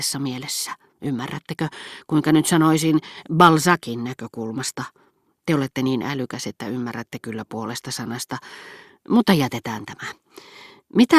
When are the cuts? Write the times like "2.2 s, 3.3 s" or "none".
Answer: none